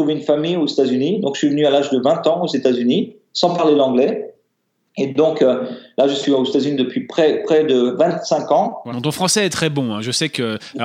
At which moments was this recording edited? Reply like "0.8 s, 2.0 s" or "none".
8.9 s